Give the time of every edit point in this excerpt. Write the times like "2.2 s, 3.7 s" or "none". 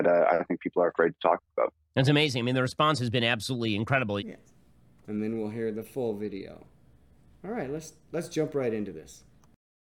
4.2 s